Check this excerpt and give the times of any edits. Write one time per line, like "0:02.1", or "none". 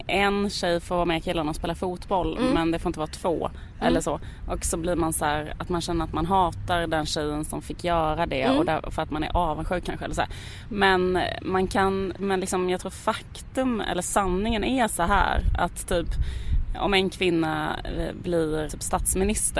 0:12.2
0:18.7